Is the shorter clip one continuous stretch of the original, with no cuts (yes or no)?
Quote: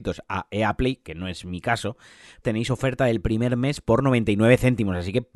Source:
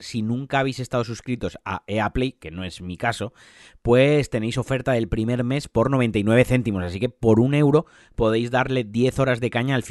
no